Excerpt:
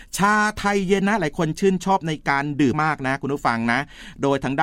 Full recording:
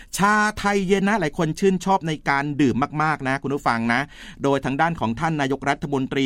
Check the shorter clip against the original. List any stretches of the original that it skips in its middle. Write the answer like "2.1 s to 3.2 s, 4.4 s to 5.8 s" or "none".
2.7 s to 2.9 s